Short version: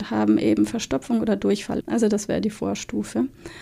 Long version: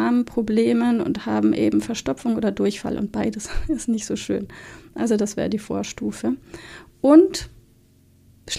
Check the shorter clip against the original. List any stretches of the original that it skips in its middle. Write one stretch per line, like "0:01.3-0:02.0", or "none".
0:03.0-0:04.9

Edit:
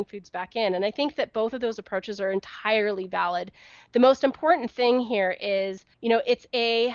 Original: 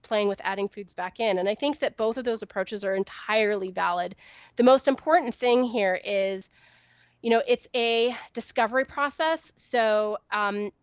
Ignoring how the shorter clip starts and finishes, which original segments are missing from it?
0:06.6-0:07.1

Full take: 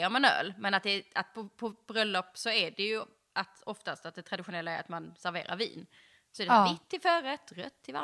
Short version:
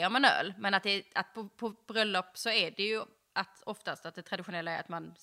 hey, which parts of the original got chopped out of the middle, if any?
none

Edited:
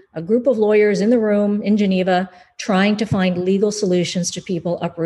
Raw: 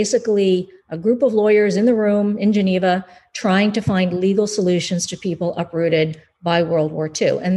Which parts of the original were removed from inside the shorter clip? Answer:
none

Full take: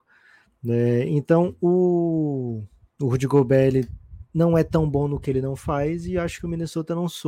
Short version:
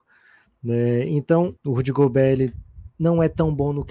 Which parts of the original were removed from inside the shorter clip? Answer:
0:01.6-0:02.9

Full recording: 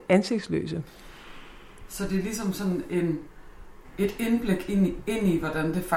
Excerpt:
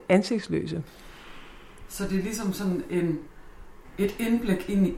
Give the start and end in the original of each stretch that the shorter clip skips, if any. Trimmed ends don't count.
none

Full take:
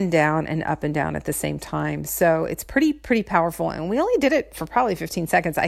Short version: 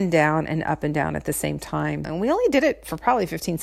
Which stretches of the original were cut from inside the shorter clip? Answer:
0:02.0-0:03.7

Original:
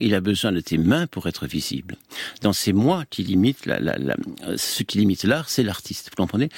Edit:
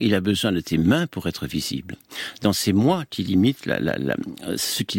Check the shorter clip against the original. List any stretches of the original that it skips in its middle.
none

